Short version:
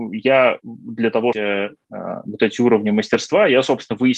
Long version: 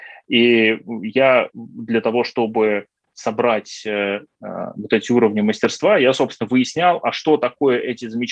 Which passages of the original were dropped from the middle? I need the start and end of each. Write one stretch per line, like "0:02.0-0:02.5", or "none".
0:02.2-0:03.8